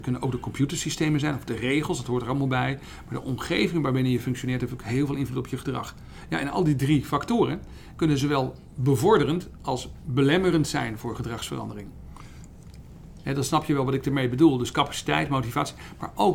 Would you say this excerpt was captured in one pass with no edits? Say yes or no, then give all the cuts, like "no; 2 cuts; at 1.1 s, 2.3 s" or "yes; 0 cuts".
no; 1 cut; at 13.2 s